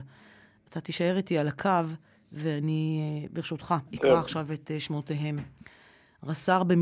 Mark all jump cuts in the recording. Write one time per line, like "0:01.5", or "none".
0:03.9